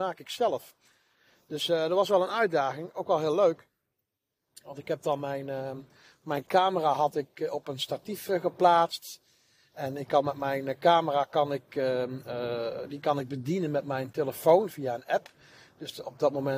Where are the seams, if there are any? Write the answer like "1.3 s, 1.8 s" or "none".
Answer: none